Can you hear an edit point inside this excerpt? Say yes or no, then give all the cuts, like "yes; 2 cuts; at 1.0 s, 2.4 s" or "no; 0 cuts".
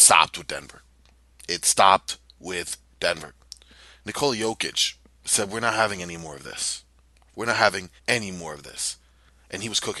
yes; 1 cut; at 8.0 s